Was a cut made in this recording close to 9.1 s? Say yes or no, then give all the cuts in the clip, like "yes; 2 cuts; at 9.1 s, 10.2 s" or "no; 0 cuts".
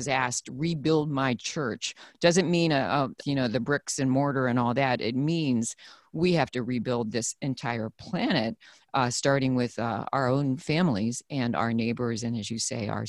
no; 1 cut; at 3.2 s